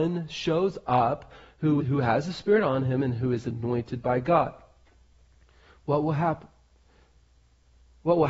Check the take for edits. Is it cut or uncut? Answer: cut